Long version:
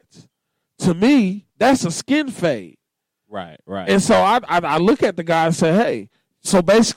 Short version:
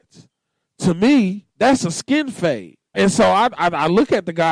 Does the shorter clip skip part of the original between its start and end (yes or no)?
yes